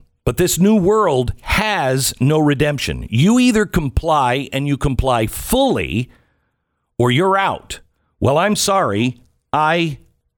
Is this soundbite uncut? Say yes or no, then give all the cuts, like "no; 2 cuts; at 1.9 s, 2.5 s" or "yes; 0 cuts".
yes; 0 cuts